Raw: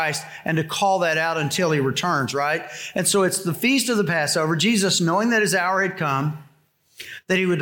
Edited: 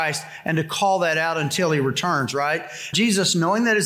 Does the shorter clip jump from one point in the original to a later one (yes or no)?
yes